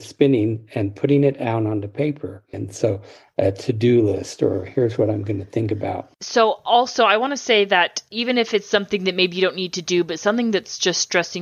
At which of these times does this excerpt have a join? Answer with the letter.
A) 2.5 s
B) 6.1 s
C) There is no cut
A